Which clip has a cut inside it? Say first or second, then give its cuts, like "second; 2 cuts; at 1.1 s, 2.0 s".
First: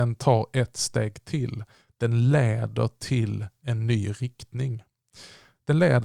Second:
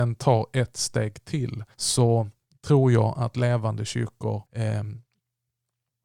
second; 2 cuts; at 1.7 s, 4.5 s